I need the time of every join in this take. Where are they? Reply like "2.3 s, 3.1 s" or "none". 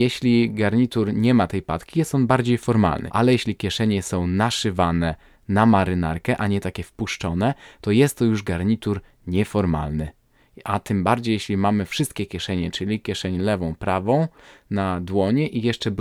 3.1 s